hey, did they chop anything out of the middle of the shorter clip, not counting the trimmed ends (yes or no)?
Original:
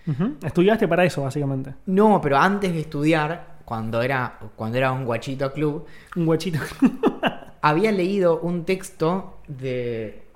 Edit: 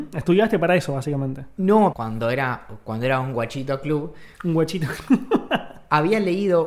yes